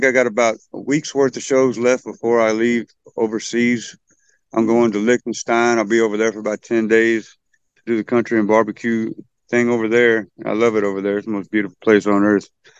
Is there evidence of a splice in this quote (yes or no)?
no